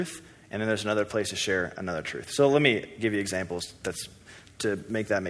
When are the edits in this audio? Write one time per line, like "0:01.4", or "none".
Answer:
none